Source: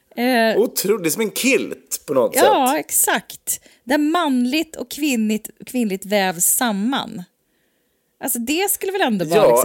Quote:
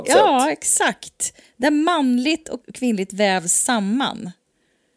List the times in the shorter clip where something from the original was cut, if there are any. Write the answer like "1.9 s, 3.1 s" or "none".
2.6 s